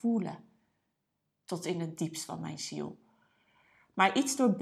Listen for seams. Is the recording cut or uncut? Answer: uncut